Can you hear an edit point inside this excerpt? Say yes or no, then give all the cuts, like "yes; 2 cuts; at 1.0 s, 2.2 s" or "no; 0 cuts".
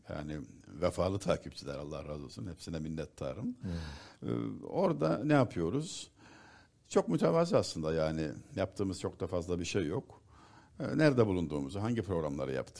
no; 0 cuts